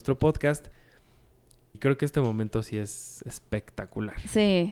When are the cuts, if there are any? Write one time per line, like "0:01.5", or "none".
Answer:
0:01.7